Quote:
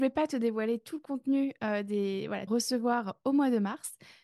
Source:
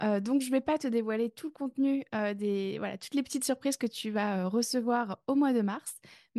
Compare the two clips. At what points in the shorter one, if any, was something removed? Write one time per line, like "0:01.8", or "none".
0:02.5